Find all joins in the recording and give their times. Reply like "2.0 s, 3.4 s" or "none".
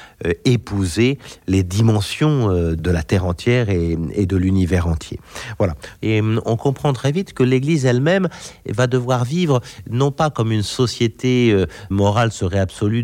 6.0 s, 11.9 s